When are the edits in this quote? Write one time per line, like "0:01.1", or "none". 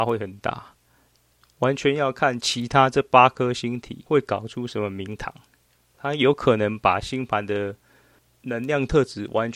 none